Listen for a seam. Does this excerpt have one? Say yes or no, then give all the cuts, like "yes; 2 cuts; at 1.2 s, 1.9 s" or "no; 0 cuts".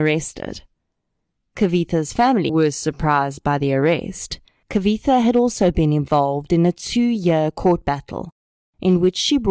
yes; 2 cuts; at 2.5 s, 4.6 s